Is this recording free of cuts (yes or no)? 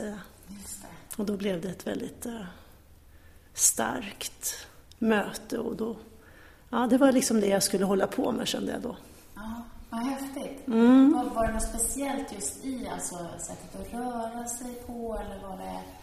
yes